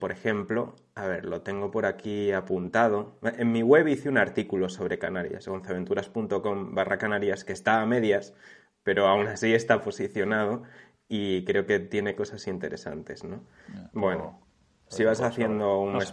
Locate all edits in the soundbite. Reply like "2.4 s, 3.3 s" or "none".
13.9 s